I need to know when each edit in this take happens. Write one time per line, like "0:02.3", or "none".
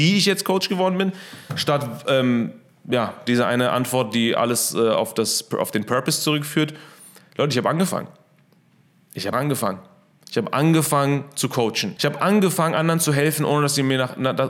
0:09.3
0:12.0